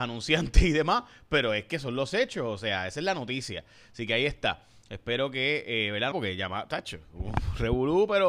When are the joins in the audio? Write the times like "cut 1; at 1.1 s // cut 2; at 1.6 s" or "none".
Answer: cut 1; at 6.1 s